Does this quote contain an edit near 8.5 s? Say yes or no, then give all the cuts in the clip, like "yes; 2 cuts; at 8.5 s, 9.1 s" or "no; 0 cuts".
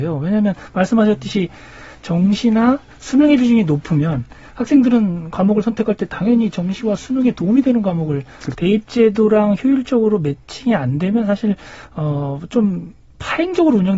yes; 1 cut; at 8.5 s